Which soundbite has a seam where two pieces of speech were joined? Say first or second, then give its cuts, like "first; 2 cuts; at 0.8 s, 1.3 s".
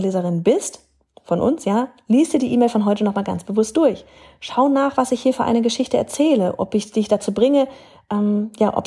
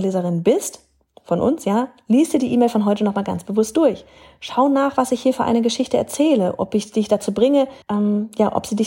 second; 1 cut; at 7.8 s